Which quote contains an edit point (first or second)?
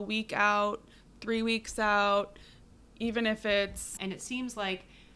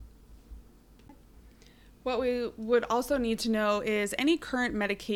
first